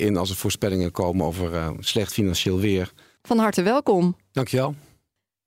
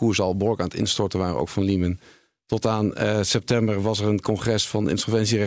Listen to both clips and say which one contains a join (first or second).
first